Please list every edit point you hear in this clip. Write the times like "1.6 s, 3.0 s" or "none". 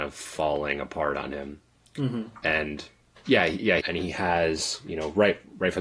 3.8 s